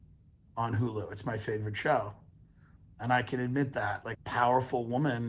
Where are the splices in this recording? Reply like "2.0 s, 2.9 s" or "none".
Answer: 4.1 s